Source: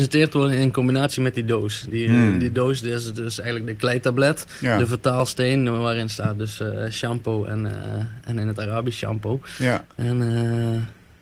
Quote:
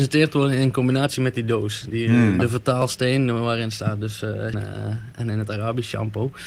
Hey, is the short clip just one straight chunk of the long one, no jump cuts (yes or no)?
no